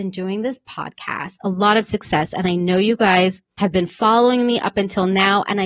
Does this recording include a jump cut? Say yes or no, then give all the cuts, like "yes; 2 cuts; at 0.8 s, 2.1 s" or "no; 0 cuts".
yes; 1 cut; at 1.4 s